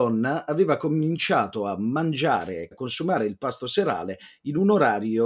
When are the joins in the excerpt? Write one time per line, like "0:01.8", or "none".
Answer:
0:02.7